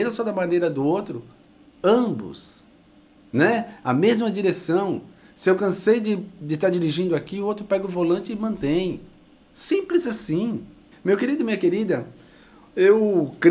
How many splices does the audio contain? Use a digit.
1